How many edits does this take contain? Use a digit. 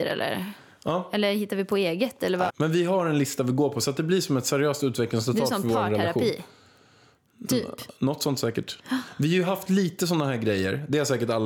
1